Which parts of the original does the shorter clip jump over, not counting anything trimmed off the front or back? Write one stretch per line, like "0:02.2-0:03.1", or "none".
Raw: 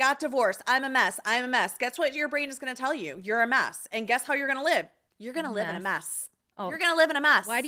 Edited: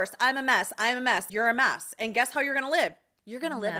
0:01.8-0:03.2